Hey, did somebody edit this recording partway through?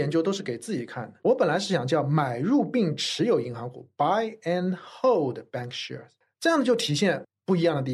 yes; 1 cut; at 1.2 s

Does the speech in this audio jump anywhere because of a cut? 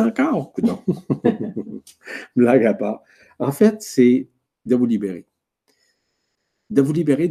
no; 0 cuts

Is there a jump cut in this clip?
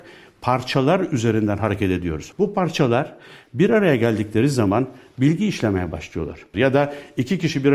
yes; 2 cuts; at 2.3 s, 6.5 s

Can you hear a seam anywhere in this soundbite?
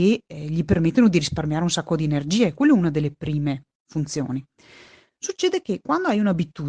no; 0 cuts

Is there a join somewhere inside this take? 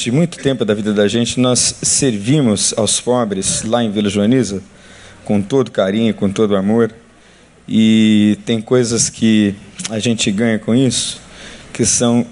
no; 0 cuts

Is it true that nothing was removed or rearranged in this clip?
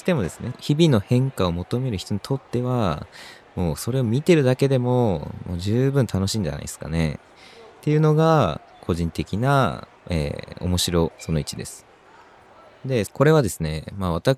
no; 3 cuts; at 10.0 s, 11.1 s, 13.1 s

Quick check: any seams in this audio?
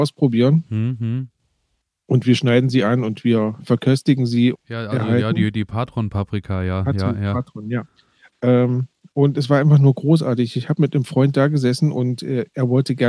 yes; 1 cut; at 4.5 s

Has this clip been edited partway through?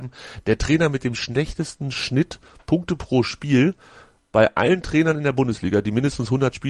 no; 0 cuts

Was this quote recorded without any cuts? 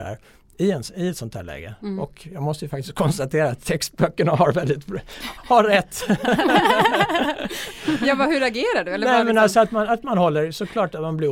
yes; 0 cuts

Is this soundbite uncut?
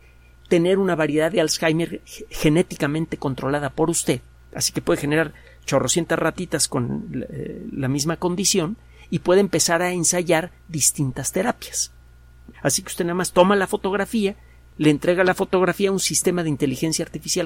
no; 1 cut; at 12.5 s

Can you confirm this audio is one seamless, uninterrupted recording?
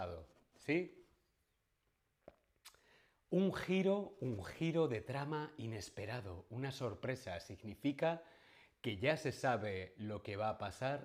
yes; 0 cuts

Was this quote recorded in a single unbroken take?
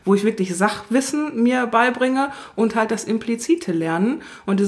yes; 0 cuts

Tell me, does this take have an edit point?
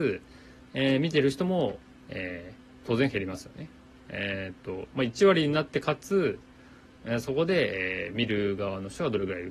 no; 0 cuts

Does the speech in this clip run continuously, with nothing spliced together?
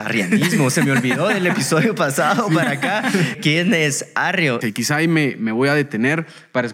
no; 2 cuts; at 3.3 s, 4.6 s

